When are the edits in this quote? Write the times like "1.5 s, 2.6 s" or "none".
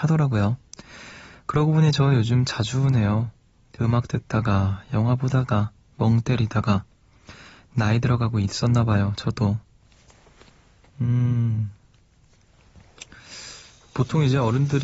none